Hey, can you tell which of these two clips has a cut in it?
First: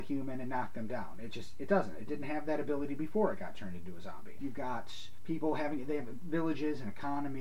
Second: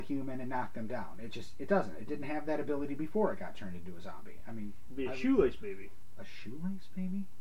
first; 1 cut; at 4.4 s

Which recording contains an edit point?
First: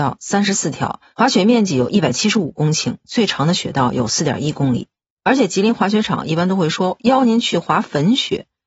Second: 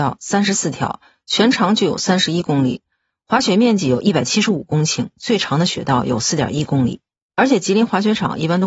first; 1 cut; at 1.1 s

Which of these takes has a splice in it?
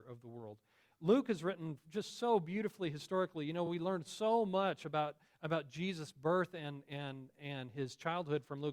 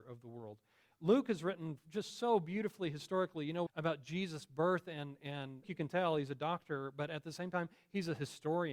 second; 2 cuts; at 3.7 s, 5.6 s

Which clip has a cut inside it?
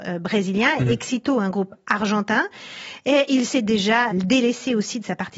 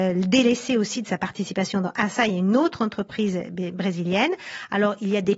first; 1 cut; at 4.1 s

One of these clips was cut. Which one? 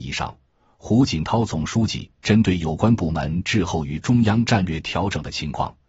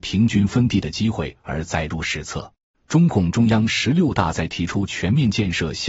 second; 1 cut; at 2.7 s

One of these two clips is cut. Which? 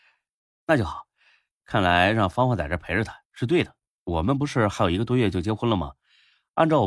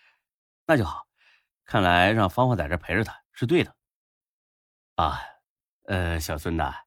first; 1 cut; at 4.0 s

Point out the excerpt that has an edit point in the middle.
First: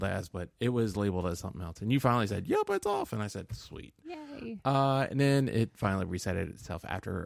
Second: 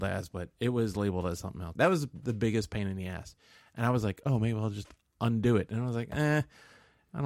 second; 1 cut; at 1.8 s

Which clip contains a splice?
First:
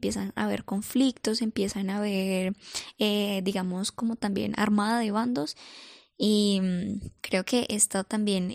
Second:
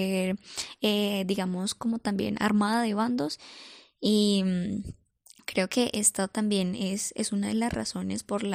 first; 1 cut; at 7.2 s

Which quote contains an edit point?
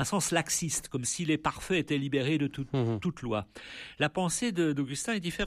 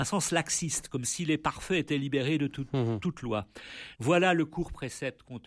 second; 1 cut; at 3.9 s

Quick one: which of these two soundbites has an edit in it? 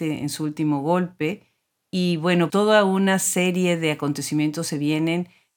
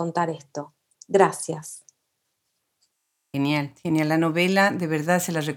first; 1 cut; at 2.5 s

